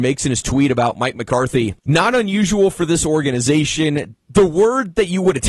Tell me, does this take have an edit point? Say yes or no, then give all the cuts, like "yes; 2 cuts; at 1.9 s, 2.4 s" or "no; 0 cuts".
yes; 2 cuts; at 1.8 s, 4.1 s